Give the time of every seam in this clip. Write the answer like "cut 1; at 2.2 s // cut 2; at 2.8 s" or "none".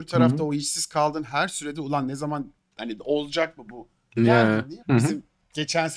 cut 1; at 4.8 s